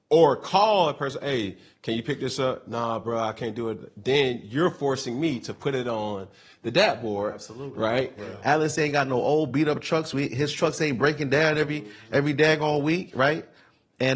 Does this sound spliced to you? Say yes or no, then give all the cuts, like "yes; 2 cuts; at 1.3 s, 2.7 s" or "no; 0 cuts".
yes; 1 cut; at 8.2 s